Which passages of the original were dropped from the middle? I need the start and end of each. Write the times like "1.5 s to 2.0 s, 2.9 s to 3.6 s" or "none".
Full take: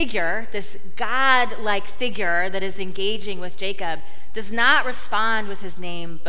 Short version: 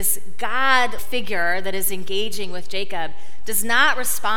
1.6 s to 1.9 s